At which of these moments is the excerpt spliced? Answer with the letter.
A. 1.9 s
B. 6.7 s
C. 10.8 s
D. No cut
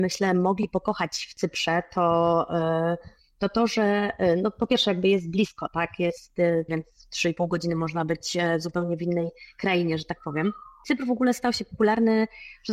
B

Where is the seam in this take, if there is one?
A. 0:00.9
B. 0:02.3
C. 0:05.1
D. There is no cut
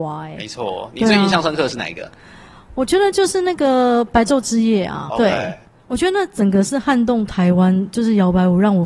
C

